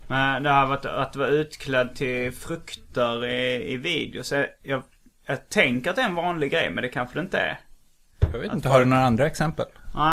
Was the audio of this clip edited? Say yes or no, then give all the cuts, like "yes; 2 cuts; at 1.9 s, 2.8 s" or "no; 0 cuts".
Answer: no; 0 cuts